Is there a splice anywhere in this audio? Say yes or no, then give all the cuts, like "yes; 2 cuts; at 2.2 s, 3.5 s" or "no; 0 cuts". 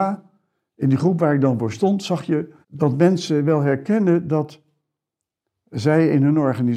yes; 1 cut; at 2.6 s